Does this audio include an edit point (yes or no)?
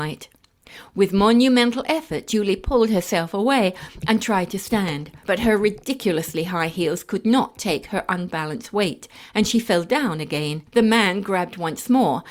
no